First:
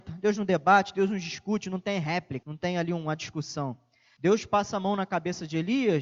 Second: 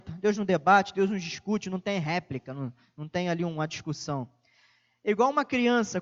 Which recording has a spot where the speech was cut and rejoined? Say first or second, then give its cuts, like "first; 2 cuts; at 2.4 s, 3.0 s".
first; 2 cuts; at 2.4 s, 4.2 s